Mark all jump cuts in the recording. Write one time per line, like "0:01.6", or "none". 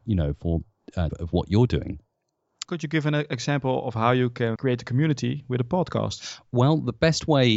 0:01.1
0:02.6
0:04.6

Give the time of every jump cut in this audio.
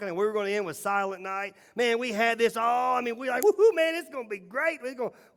none

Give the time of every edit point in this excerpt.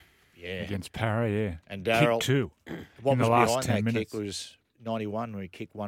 none

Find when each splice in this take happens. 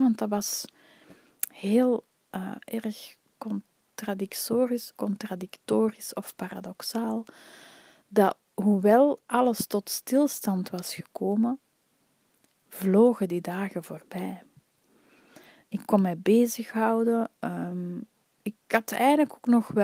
0:04.9
0:08.5

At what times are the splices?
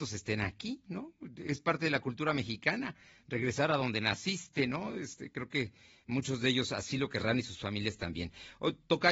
none

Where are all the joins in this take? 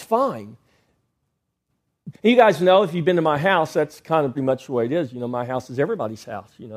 0:02.1
0:04.4

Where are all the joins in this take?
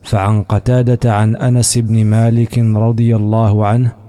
none

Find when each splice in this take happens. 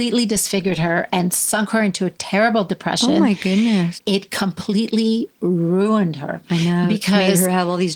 0:04.0

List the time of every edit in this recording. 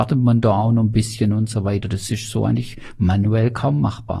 none

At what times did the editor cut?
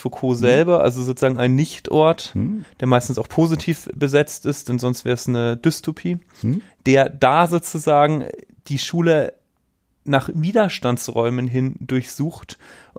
0:06.7

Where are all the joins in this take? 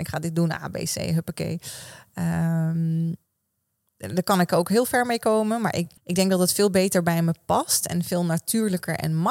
0:06.0

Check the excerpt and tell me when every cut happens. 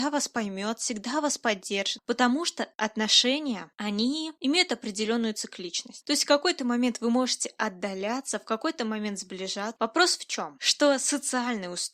0:09.8

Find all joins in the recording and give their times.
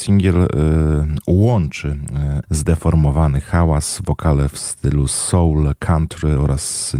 0:02.4

